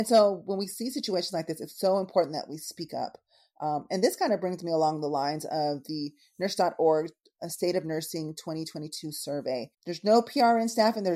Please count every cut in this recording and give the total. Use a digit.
1